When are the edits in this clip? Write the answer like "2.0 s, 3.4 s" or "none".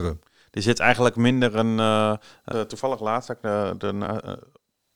2.5 s